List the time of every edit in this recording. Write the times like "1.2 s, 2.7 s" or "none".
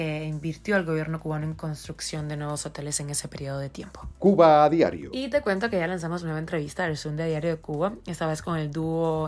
none